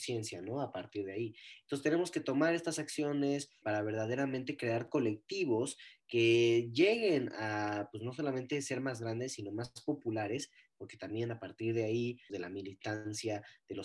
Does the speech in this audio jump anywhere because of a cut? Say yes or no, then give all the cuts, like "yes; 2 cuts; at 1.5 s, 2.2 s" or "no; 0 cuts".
yes; 2 cuts; at 3.6 s, 12.3 s